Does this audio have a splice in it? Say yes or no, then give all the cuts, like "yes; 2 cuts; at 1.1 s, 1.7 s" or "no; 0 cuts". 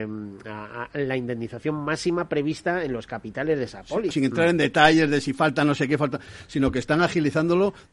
yes; 1 cut; at 4.1 s